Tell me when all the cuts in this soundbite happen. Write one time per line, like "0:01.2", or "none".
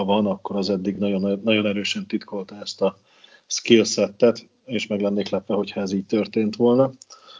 none